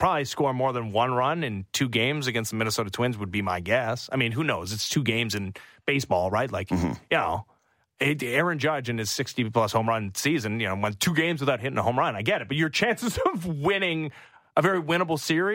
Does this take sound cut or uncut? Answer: uncut